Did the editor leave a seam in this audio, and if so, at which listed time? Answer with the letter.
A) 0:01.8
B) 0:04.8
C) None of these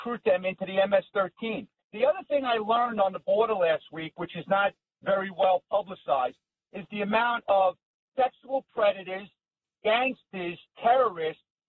A